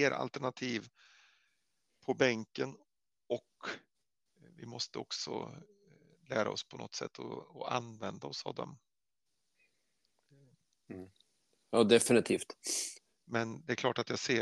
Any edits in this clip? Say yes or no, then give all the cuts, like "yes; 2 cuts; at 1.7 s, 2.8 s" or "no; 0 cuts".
yes; 2 cuts; at 10.9 s, 13.1 s